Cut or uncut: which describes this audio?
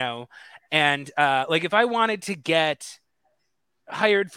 uncut